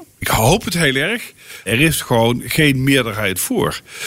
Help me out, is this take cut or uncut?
cut